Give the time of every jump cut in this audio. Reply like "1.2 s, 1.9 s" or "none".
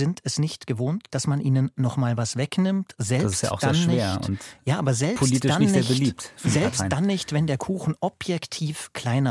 none